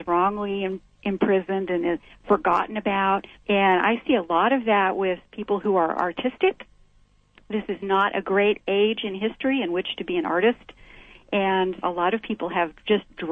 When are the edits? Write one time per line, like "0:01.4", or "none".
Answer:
0:03.3
0:11.8